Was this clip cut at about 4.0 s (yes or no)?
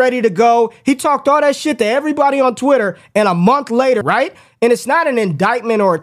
yes